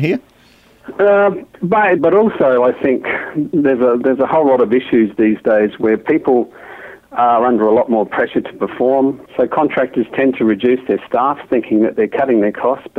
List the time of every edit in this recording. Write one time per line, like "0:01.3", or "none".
0:02.0
0:09.3